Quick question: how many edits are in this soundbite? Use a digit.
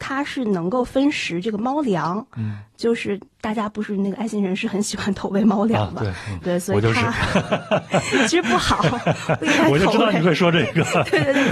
1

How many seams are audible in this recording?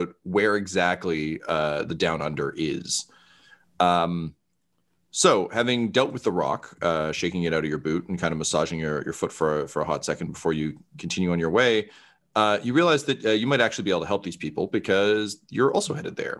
0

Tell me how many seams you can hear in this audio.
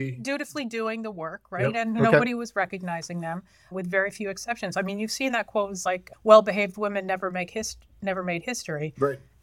0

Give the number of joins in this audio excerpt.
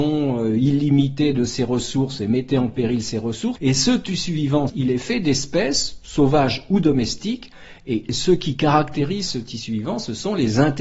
2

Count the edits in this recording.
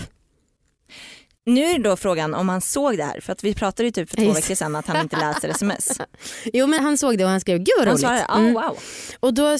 1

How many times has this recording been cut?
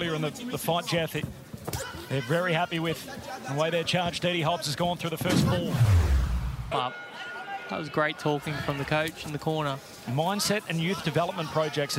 1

